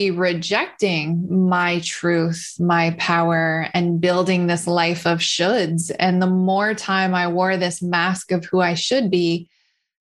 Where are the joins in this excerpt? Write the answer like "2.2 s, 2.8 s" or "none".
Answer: none